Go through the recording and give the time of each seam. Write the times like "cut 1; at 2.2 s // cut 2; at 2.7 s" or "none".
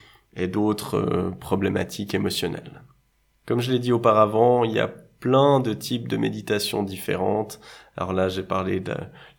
none